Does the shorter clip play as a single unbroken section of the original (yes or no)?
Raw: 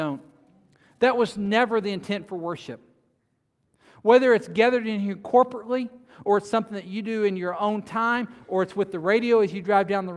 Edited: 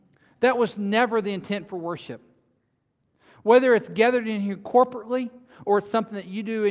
yes